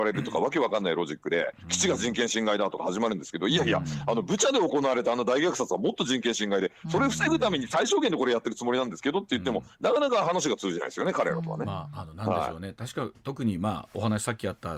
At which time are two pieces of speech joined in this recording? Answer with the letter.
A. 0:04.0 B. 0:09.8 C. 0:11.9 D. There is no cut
D